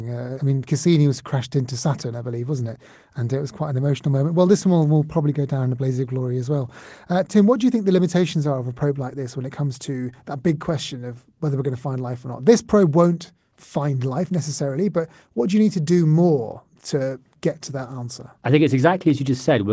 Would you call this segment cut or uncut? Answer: cut